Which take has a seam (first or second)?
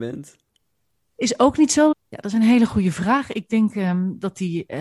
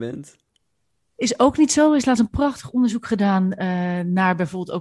first